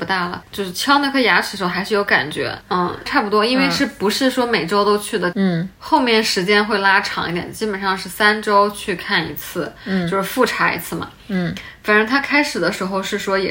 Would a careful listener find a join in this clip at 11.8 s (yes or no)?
no